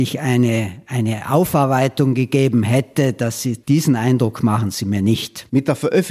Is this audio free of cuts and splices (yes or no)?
no